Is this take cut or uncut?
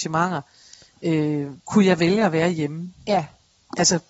cut